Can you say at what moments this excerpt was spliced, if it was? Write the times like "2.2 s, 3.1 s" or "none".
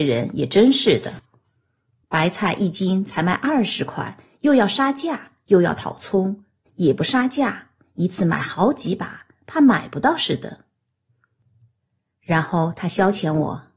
6.7 s